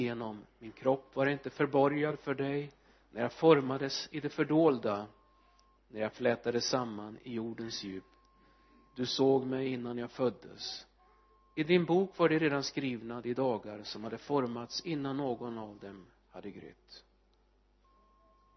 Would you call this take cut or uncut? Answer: uncut